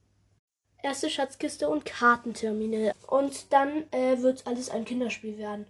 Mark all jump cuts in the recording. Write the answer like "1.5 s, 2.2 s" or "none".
2.9 s